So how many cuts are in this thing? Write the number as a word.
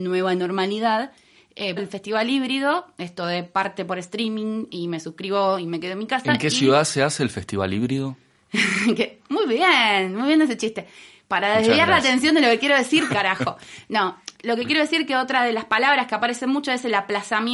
three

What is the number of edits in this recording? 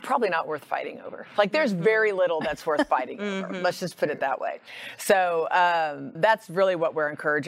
one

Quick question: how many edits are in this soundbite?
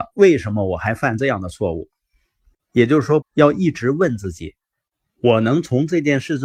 one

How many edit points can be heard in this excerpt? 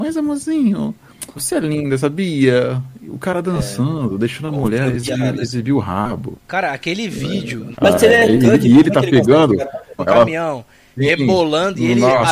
three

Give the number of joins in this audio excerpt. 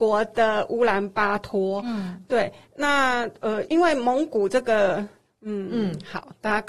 two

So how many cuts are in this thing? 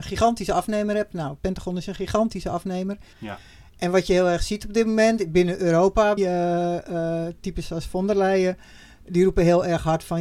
two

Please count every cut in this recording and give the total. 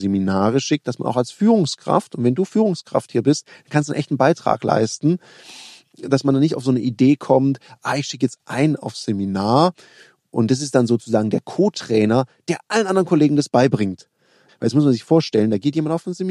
one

